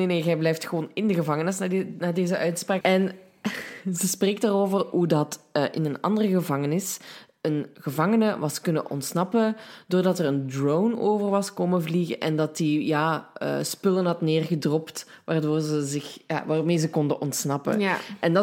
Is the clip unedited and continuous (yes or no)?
no